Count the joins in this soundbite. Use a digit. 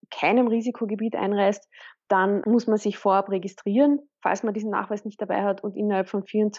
0